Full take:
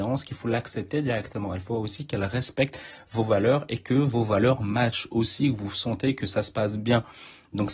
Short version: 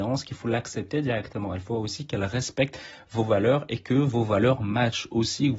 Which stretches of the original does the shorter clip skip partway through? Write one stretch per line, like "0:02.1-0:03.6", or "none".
none